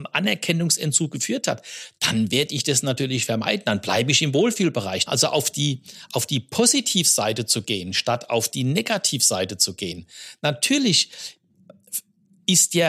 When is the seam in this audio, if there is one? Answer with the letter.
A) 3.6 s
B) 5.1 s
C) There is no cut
B